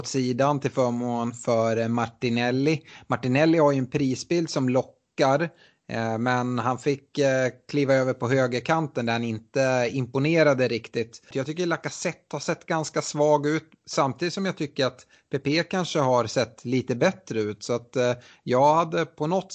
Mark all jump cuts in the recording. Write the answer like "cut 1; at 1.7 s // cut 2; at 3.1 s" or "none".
cut 1; at 11.3 s